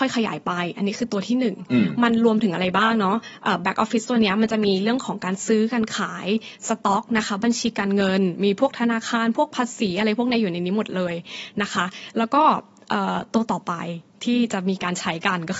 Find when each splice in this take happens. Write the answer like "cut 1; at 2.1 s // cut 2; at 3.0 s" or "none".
none